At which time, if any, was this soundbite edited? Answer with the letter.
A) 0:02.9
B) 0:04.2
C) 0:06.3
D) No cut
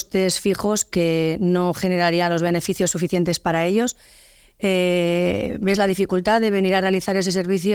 D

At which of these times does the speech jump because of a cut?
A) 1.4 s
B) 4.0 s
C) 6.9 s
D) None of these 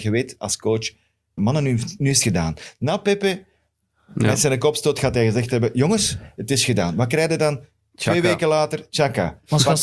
A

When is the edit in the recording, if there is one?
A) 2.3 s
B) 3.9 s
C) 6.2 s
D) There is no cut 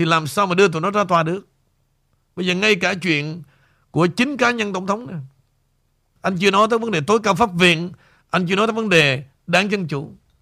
C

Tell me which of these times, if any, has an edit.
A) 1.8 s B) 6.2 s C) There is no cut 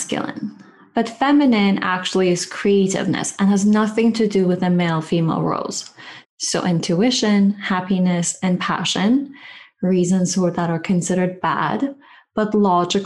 B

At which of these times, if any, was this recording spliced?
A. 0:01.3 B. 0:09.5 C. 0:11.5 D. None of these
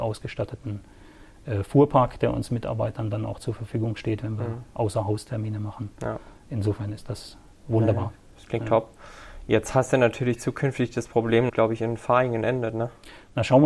C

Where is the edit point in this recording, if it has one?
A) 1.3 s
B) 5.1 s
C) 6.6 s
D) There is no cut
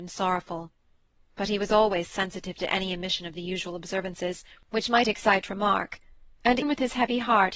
C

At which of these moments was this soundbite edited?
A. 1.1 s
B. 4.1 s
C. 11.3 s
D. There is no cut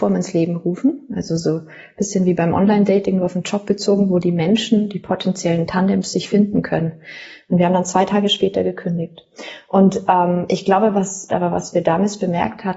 C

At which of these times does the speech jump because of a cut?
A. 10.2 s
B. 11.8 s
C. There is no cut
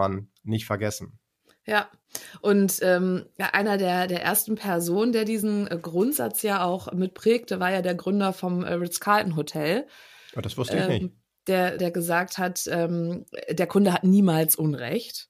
B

